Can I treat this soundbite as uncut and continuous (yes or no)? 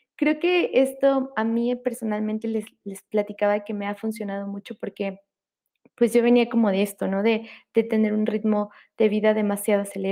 yes